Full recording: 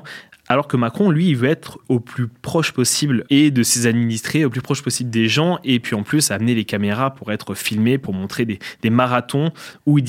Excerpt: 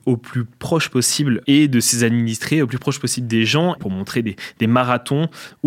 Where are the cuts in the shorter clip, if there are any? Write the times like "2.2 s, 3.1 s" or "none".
3.8 s